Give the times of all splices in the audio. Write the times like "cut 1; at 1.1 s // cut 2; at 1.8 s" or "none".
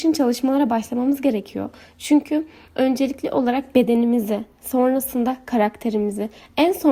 none